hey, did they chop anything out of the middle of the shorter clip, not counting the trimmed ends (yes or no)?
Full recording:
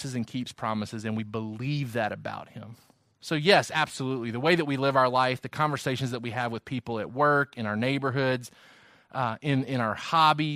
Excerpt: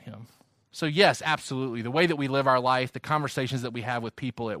no